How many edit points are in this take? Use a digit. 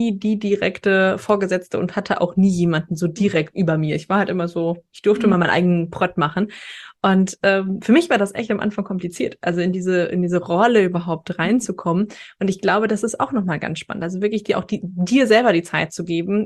0